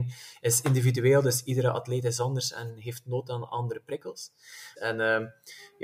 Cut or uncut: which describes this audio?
cut